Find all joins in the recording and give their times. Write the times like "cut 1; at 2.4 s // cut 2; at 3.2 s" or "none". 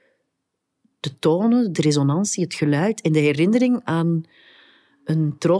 none